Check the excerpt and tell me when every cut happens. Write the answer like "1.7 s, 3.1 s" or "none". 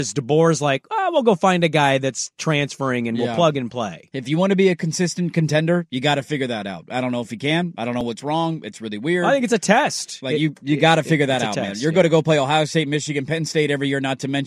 none